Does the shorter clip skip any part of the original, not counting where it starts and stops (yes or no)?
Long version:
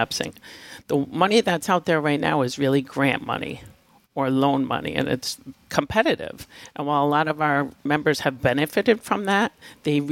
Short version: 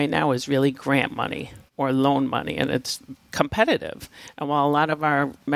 yes